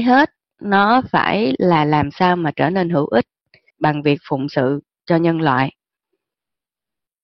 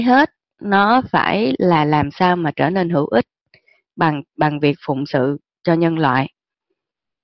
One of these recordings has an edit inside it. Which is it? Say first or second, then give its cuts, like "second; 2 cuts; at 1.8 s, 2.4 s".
first; 1 cut; at 3.7 s